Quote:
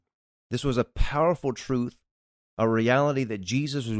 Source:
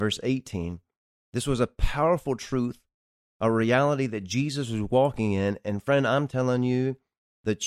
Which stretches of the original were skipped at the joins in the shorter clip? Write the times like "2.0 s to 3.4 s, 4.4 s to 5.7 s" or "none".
none